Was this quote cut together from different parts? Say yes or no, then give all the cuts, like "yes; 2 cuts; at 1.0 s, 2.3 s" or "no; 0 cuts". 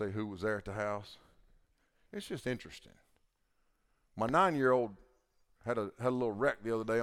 yes; 1 cut; at 2.1 s